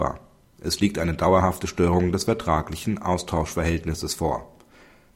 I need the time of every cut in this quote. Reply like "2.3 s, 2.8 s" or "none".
none